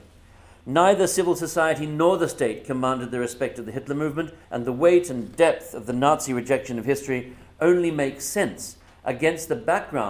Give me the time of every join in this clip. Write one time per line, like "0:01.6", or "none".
0:04.4